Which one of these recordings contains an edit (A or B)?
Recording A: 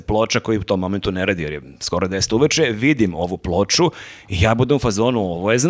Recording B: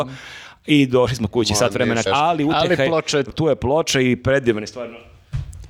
B